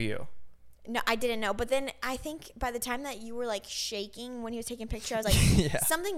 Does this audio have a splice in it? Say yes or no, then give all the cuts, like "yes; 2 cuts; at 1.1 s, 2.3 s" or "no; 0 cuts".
no; 0 cuts